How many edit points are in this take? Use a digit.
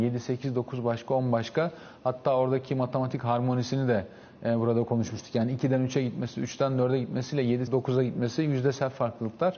1